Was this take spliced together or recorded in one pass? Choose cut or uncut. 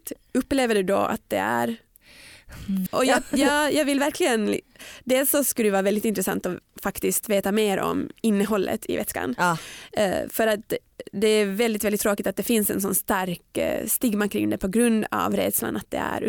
cut